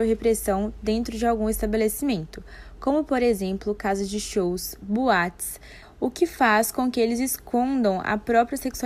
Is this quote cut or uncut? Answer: cut